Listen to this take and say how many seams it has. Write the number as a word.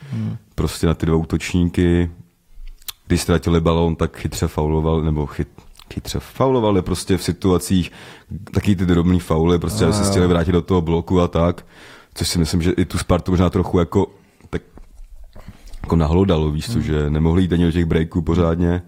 one